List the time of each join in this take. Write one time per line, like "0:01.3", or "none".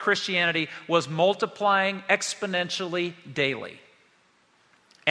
none